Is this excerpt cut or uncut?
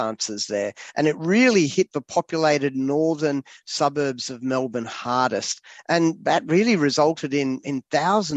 uncut